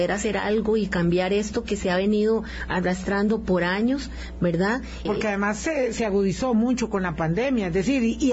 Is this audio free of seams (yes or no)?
no